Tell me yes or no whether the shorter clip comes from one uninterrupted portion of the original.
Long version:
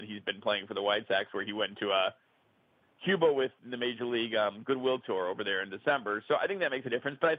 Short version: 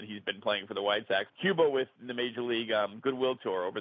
no